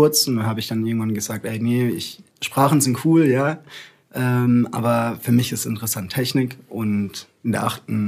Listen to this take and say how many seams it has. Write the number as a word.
one